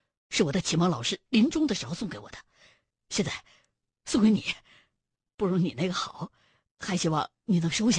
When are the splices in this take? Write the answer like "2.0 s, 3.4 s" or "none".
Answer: none